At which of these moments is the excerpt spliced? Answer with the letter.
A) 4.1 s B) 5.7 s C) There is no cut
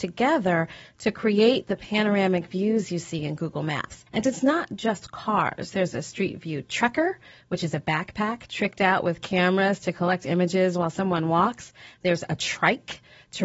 A